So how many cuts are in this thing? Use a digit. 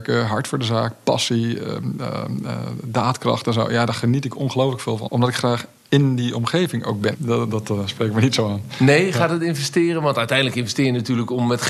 2